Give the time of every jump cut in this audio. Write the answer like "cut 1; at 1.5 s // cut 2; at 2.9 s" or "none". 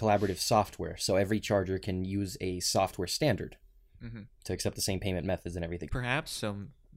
cut 1; at 4.3 s // cut 2; at 5.9 s